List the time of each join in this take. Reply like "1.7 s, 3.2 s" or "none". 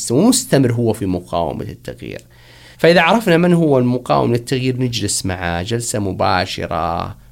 2.7 s